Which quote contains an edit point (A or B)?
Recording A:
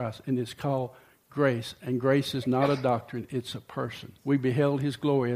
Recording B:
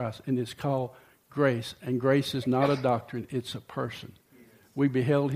A